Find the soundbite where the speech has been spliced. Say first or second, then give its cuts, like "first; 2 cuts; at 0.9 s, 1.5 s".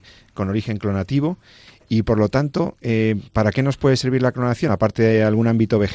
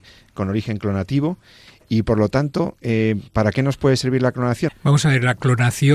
second; 1 cut; at 4.7 s